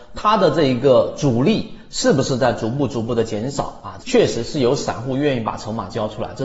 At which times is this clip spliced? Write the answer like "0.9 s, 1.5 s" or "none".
4.0 s